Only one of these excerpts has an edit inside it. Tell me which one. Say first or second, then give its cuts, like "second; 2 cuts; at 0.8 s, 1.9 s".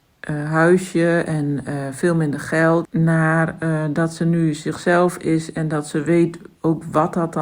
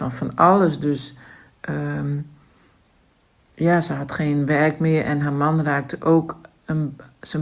first; 1 cut; at 2.8 s